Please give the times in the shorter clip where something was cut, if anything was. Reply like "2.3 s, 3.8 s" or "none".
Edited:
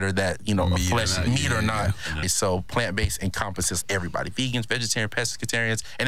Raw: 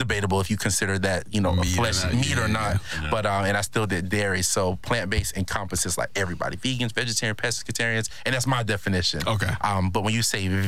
2.2 s, 3.8 s